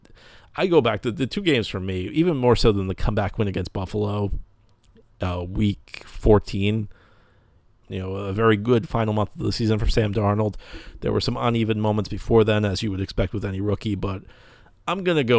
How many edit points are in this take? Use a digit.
1